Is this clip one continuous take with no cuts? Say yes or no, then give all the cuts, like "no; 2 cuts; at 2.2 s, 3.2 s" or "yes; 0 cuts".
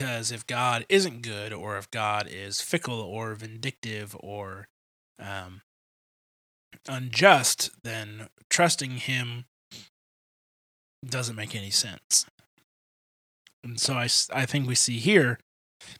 yes; 0 cuts